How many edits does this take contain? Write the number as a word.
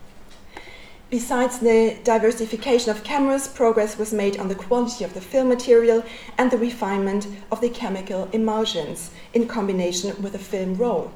zero